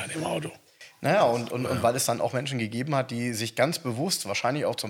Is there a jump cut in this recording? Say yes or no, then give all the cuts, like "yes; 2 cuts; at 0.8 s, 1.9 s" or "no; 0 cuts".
no; 0 cuts